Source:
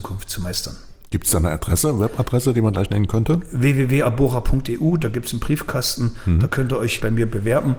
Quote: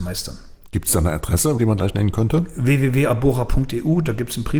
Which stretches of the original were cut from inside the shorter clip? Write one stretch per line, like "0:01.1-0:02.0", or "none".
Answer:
0:02.0-0:02.5

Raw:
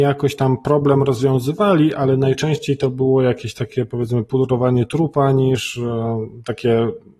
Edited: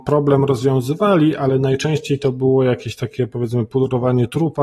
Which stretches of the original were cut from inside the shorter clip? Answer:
none

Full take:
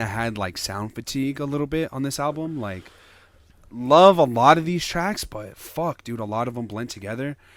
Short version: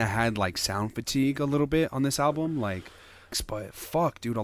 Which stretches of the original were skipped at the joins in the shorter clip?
0:03.3-0:05.2

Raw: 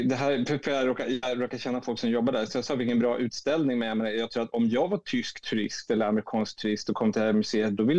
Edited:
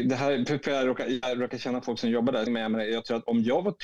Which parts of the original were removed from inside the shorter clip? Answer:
0:02.5-0:03.7

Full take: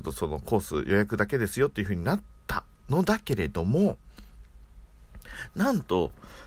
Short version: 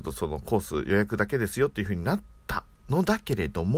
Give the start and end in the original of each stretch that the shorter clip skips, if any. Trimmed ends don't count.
none

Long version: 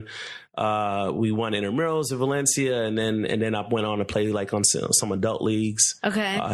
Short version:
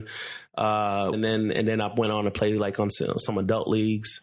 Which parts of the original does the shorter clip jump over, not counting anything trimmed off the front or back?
0:01.1-0:02.9

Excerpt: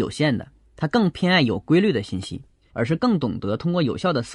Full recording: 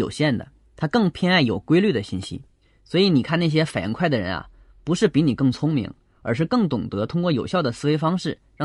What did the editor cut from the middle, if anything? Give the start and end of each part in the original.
0:02.7-0:06.2

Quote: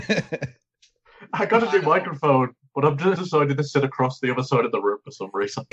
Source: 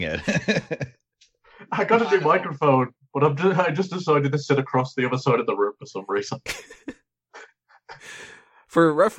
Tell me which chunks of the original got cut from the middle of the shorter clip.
0:03.5-0:03.9

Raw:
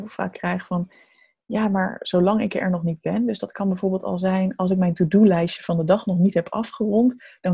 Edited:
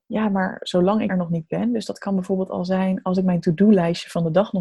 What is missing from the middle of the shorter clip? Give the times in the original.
0:02.5-0:02.6

